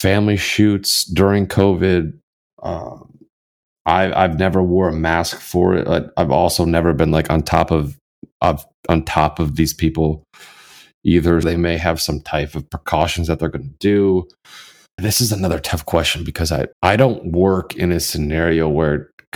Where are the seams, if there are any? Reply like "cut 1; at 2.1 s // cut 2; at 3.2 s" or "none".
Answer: cut 1; at 11.4 s // cut 2; at 15.0 s // cut 3; at 16.7 s